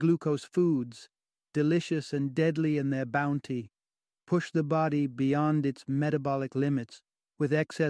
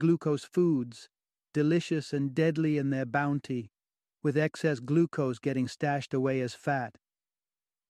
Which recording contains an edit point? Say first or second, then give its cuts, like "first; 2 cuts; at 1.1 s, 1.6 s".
second; 1 cut; at 4.2 s